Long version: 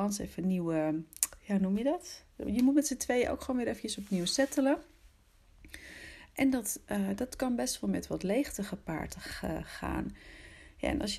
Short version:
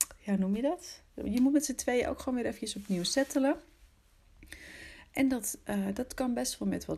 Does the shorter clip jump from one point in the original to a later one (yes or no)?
no